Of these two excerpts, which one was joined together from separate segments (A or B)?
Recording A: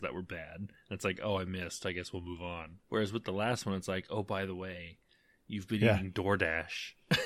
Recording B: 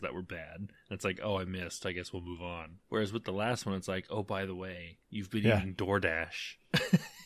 B